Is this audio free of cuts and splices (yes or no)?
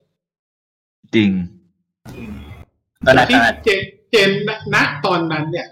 yes